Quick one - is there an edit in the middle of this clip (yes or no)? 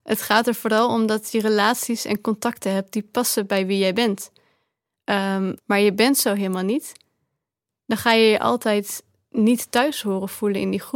yes